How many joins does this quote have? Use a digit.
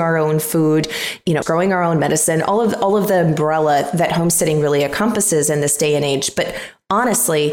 1